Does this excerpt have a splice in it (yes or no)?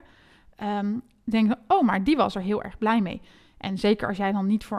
no